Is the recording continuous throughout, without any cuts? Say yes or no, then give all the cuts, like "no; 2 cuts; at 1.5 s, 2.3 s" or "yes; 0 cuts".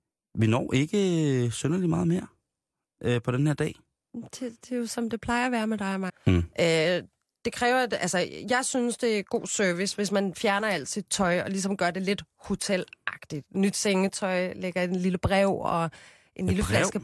no; 1 cut; at 6.1 s